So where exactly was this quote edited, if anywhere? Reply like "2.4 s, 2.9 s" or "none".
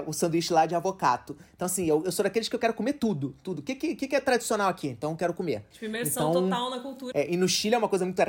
5.7 s, 7.1 s